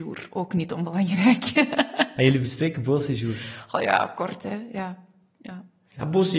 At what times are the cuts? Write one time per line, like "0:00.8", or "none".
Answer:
none